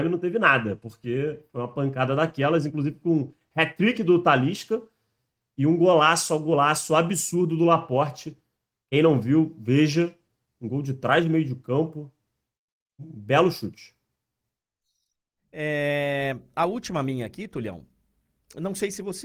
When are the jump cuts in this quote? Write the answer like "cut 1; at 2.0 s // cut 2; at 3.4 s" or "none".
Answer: none